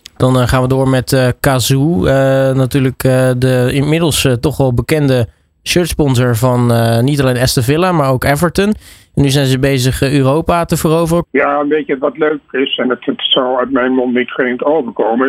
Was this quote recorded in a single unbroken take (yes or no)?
no